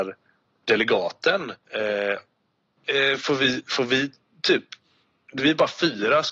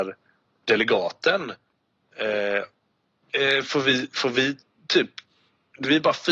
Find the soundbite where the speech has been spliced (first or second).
first